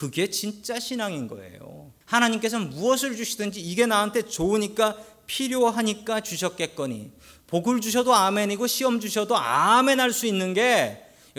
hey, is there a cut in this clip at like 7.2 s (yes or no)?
no